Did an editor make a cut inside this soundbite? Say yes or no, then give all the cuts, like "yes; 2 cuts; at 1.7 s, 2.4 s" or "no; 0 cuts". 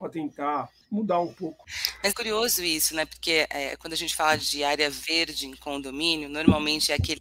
yes; 1 cut; at 2.1 s